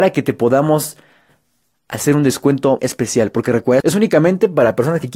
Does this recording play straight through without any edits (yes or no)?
no